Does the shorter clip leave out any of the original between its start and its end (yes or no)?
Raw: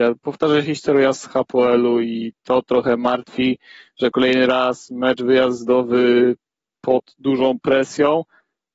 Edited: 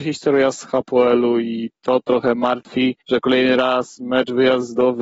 yes